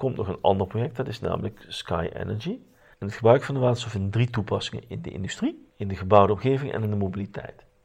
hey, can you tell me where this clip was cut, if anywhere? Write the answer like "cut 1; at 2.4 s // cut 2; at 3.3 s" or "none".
cut 1; at 2.9 s // cut 2; at 5.7 s

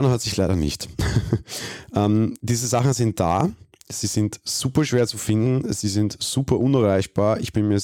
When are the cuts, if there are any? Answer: none

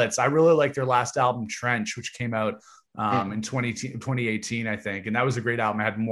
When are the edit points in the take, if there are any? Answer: none

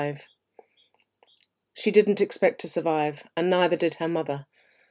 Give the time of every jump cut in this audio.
none

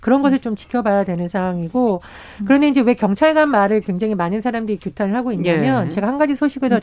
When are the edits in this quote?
none

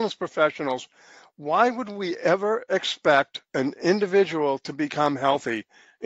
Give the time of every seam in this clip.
cut 1; at 3.5 s

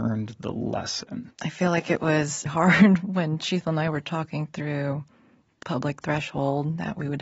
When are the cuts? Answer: cut 1; at 1.3 s // cut 2; at 2.5 s // cut 3; at 5.6 s

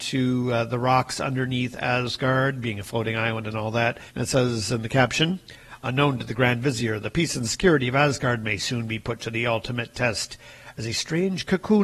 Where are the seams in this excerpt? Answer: cut 1; at 4.1 s

